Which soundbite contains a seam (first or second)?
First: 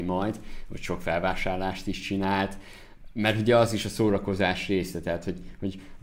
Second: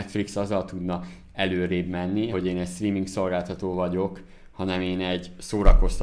second